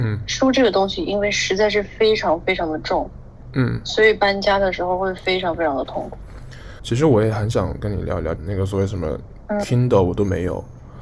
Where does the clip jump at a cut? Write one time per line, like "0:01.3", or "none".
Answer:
0:06.8
0:08.4